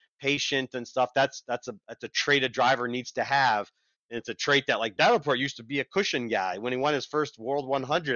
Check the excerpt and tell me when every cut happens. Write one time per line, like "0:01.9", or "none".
0:05.0